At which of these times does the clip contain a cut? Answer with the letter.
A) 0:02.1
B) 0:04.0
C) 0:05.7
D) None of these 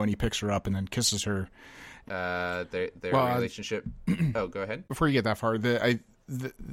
A